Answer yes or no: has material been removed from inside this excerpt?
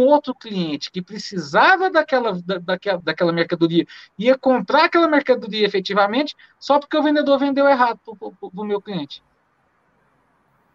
yes